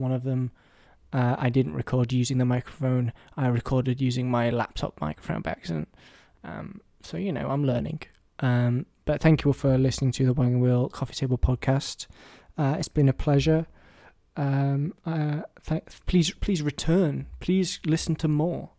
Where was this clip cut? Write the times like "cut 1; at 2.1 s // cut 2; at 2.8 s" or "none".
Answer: none

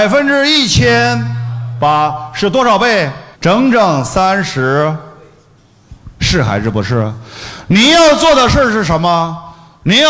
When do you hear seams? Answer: cut 1; at 3.3 s // cut 2; at 6.2 s

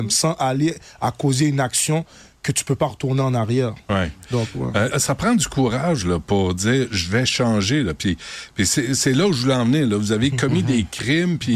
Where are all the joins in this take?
cut 1; at 4.9 s

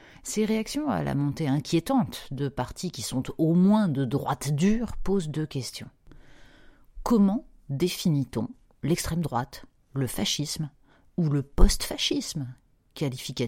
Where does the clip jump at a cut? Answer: none

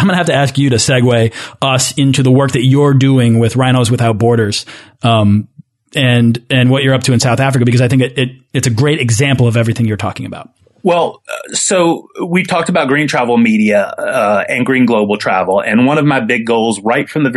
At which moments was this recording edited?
none

